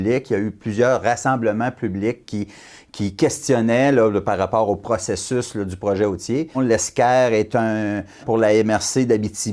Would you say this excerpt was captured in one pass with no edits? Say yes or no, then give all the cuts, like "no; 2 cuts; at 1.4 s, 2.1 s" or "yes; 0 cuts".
no; 2 cuts; at 6.5 s, 8.2 s